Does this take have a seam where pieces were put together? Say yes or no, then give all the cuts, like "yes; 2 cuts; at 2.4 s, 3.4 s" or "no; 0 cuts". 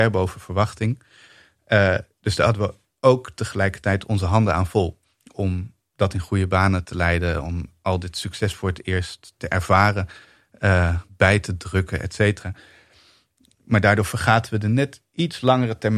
no; 0 cuts